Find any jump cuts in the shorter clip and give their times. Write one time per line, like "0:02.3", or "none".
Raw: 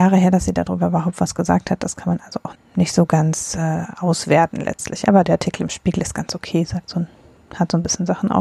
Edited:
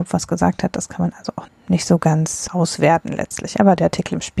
0:02.5

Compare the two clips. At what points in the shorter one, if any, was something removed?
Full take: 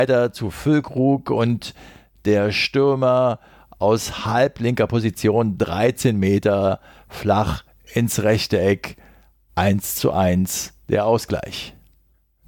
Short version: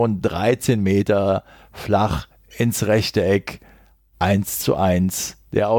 none

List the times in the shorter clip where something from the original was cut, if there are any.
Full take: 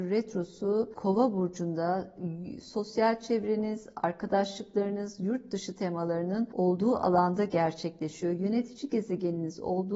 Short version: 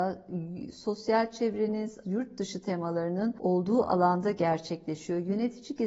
0:02.0

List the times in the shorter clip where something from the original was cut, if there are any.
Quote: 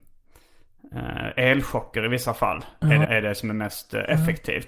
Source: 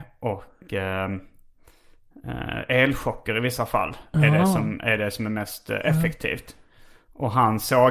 0:03.0

